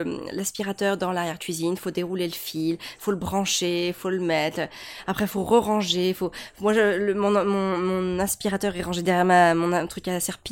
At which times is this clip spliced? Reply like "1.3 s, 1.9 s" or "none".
none

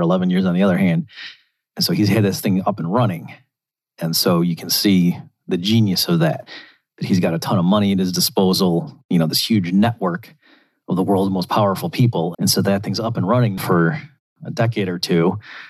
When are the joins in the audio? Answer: 12.3 s, 13.6 s

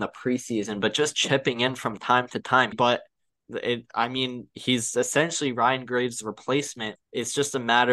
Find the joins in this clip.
2.7 s, 7.0 s

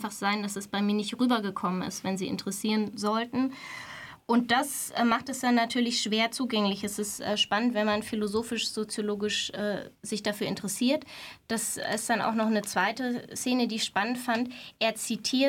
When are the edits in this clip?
none

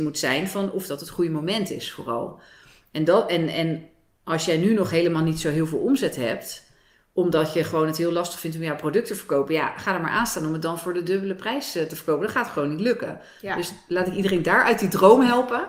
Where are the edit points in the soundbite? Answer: none

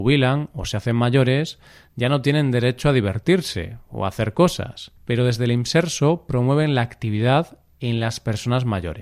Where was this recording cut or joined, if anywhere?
5.0 s

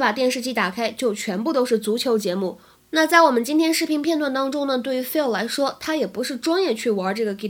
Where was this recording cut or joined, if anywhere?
2.9 s

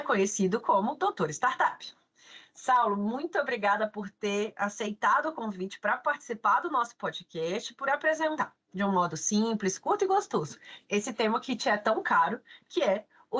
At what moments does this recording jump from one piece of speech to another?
none

